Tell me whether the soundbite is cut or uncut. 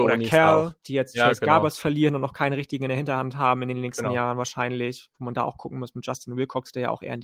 uncut